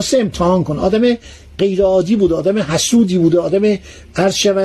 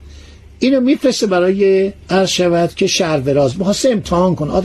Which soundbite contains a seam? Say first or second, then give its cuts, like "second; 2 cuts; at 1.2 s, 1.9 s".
second; 1 cut; at 2.0 s